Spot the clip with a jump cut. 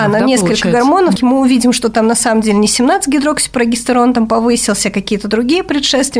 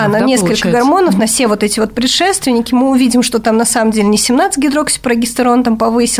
first; 1 cut; at 1.2 s

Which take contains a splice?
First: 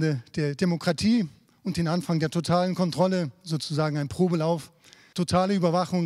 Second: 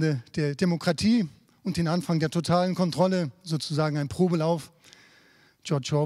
first; 1 cut; at 5.1 s

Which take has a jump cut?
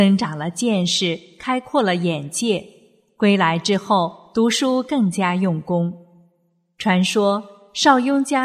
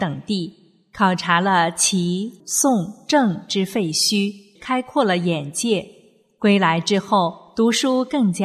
second; 2 cuts; at 2.4 s, 4.6 s

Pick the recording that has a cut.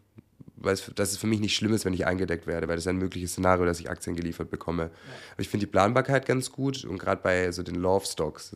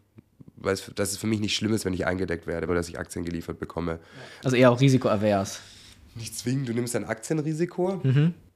second; 2 cuts; at 2.7 s, 4.4 s

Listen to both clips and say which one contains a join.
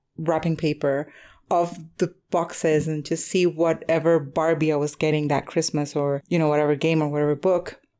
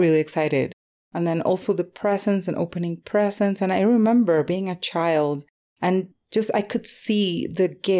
second; 1 cut; at 0.9 s

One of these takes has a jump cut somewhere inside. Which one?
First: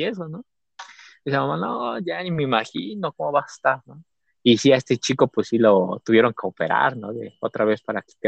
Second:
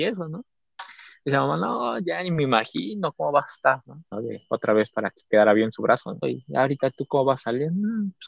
second; 2 cuts; at 4.1 s, 6.2 s

